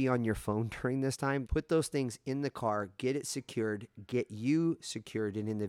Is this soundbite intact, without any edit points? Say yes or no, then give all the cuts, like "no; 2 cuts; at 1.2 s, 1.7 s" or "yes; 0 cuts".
no; 1 cut; at 1.5 s